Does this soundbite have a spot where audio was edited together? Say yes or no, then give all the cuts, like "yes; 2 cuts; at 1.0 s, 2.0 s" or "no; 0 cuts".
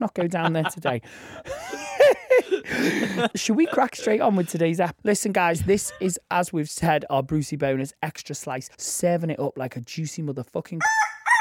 yes; 3 cuts; at 3.3 s, 5.0 s, 8.7 s